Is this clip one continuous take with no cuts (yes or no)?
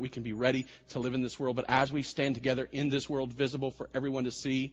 yes